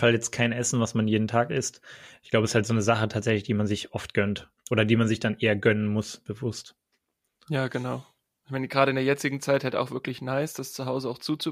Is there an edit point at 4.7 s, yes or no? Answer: no